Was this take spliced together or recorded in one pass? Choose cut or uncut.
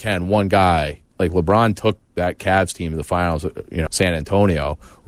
cut